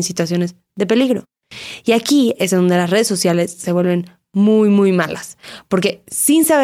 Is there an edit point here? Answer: no; 0 cuts

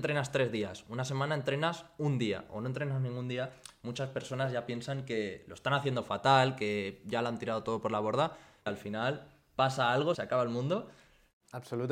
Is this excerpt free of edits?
no; 2 cuts; at 8.7 s, 10.1 s

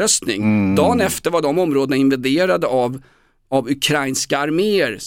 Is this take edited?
no; 0 cuts

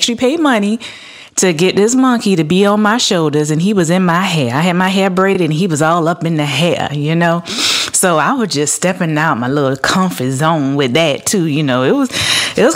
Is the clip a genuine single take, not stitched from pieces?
yes; 0 cuts

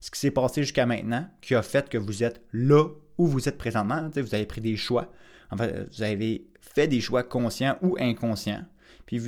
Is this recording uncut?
yes; 0 cuts

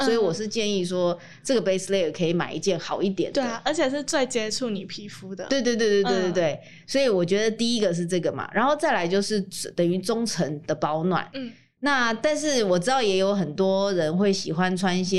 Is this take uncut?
no; 1 cut; at 11.3 s

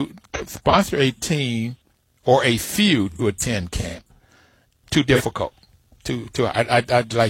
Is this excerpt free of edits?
no; 1 cut; at 4.8 s

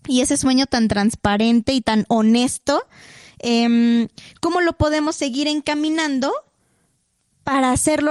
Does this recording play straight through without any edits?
yes; 0 cuts

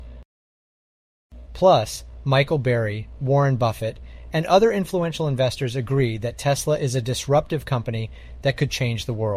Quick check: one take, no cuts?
no; 1 cut; at 1.5 s

